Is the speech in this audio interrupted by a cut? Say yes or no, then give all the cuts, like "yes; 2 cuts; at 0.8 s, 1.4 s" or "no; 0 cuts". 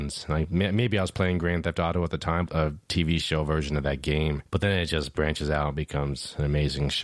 yes; 1 cut; at 2.5 s